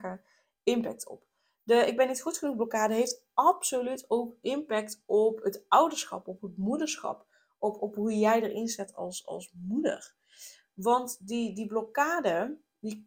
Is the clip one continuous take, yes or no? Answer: yes